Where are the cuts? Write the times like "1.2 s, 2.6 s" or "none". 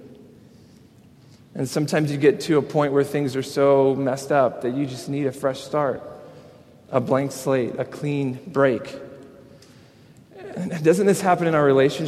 none